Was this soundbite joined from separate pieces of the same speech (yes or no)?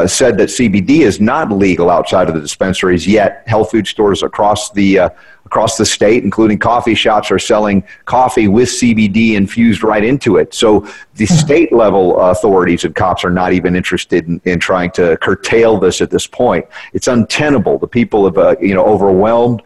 no